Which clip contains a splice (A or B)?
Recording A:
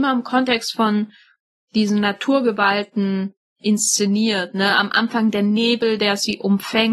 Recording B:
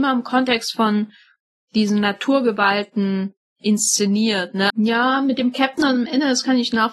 B